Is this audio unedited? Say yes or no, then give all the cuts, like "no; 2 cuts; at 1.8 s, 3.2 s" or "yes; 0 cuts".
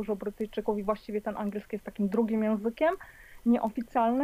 yes; 0 cuts